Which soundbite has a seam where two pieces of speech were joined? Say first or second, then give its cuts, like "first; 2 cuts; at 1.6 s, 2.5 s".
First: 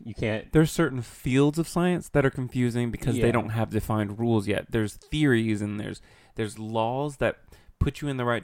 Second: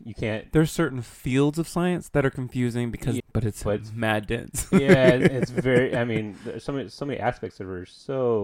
second; 1 cut; at 3.2 s